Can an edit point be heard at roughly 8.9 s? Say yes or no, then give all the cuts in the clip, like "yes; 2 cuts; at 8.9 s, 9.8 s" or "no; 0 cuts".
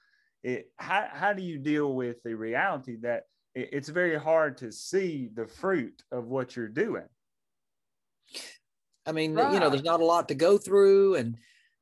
yes; 1 cut; at 8.9 s